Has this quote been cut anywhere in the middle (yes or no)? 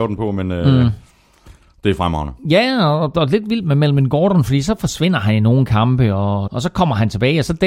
yes